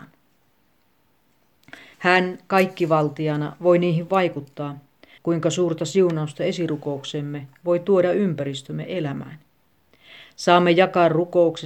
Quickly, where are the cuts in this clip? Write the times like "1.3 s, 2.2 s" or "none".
1.9 s, 5.2 s